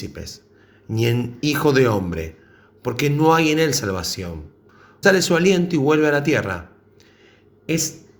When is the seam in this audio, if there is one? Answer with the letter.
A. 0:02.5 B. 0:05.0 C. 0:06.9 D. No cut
B